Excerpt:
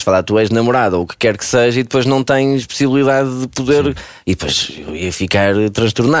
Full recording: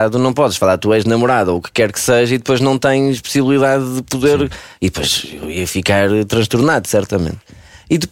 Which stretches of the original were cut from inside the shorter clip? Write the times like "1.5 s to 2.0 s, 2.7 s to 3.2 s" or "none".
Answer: none